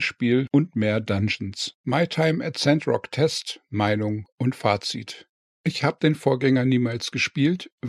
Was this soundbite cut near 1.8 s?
yes; 1 cut; at 1.8 s

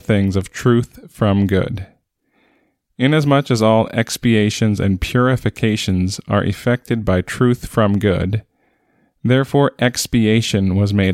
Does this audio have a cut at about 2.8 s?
no; 0 cuts

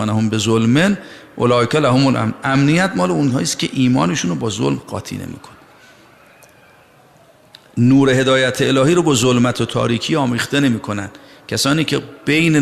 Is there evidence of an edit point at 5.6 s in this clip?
no; 0 cuts

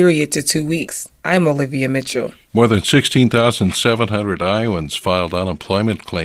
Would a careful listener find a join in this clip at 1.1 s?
yes; 1 cut; at 1.1 s

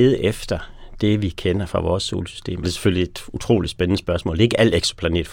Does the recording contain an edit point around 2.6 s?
yes; 1 cut; at 2.6 s

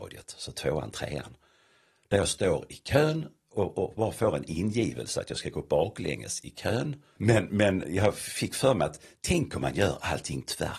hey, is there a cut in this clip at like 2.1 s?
no; 1 cut; at 7.2 s

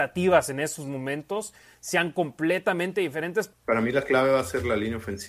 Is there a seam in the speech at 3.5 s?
yes; 1 cut; at 3.5 s

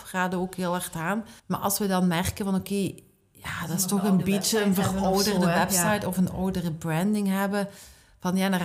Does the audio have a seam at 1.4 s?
yes; 1 cut; at 1.4 s

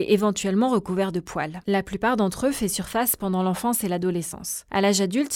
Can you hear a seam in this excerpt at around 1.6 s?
yes; 1 cut; at 1.6 s

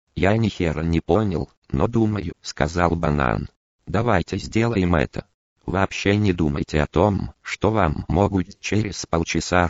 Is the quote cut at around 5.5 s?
no; 1 cut; at 2.3 s

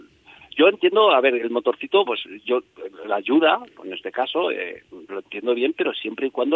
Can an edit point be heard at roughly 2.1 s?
no; 0 cuts

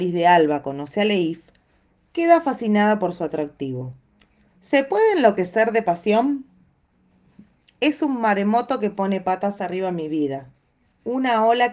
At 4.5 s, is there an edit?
yes; 1 cut; at 4.5 s

